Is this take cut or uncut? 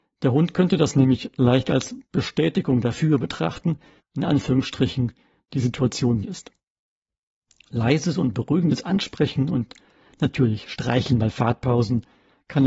cut